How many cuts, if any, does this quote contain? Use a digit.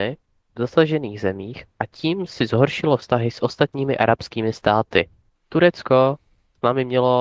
1